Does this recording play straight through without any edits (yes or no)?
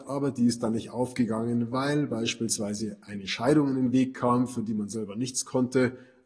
yes